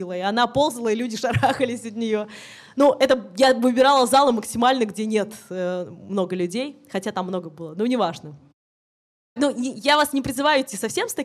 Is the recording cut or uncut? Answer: uncut